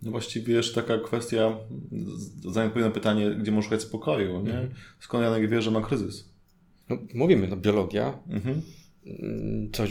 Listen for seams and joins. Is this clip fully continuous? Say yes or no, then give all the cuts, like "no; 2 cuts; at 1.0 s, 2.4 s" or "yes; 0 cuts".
yes; 0 cuts